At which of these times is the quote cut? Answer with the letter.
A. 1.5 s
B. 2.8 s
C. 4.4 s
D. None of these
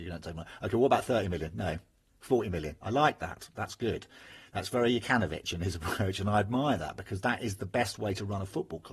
B